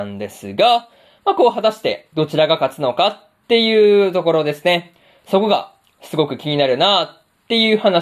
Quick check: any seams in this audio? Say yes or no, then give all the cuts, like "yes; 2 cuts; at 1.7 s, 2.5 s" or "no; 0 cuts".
no; 0 cuts